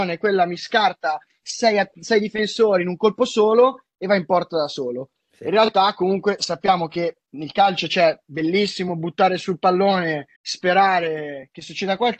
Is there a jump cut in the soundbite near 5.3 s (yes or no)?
no